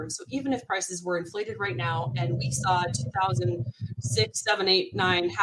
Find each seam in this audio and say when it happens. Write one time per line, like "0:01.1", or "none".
none